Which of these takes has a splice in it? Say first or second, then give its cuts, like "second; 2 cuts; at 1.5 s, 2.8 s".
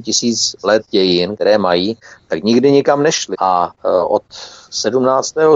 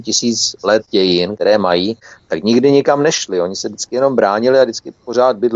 first; 1 cut; at 3.3 s